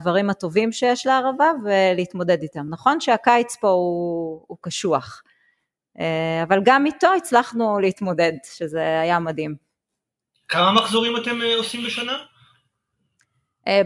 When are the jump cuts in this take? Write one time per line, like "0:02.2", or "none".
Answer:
none